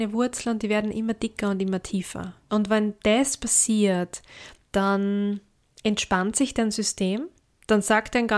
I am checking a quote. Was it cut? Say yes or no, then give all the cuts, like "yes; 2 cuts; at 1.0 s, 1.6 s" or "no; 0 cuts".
yes; 1 cut; at 2.5 s